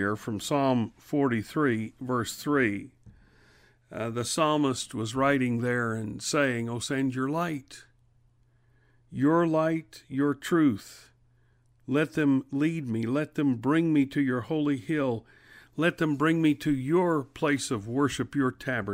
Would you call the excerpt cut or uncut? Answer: uncut